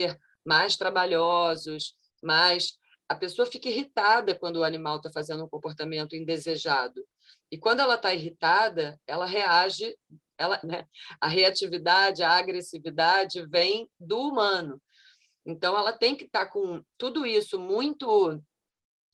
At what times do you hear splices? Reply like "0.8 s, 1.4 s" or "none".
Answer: 10.6 s